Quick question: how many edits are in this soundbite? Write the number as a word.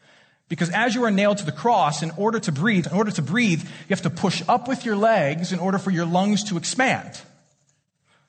one